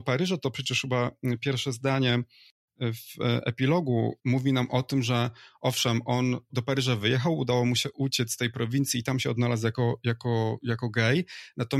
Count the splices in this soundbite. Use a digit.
1